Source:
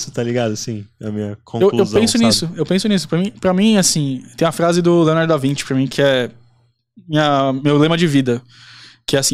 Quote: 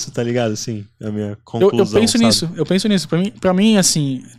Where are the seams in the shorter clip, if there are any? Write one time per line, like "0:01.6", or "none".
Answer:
none